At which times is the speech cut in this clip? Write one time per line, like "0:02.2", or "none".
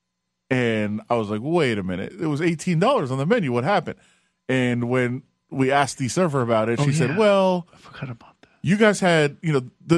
none